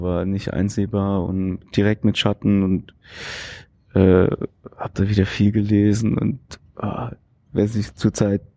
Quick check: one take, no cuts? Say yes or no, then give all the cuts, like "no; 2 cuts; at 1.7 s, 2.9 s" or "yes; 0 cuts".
yes; 0 cuts